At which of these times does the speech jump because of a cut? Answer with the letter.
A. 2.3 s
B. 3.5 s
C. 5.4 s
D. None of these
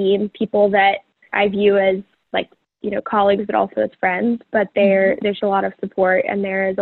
C